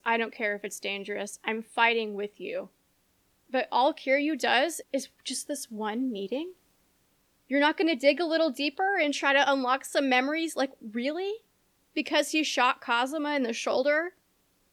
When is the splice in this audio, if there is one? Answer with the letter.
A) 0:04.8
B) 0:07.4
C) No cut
A